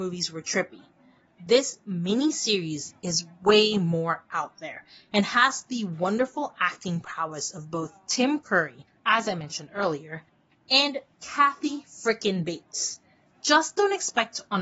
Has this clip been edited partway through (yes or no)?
yes